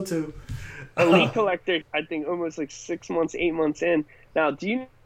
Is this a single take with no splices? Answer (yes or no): no